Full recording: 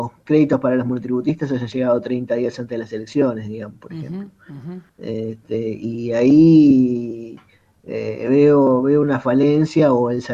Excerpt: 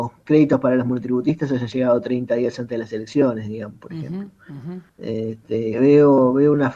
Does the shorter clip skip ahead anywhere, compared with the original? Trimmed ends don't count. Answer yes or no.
yes